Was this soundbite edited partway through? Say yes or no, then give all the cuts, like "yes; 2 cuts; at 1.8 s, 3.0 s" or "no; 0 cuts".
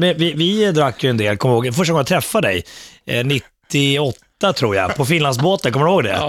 no; 0 cuts